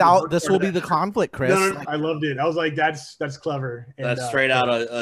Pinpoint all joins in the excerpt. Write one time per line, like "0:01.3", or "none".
0:01.8